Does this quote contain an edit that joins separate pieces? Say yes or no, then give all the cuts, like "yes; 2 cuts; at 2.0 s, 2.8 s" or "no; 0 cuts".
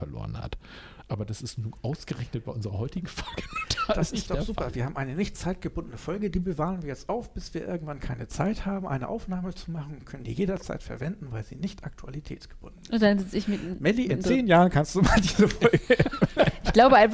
no; 0 cuts